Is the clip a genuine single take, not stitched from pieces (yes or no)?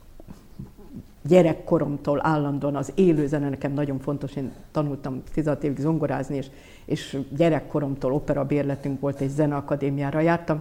yes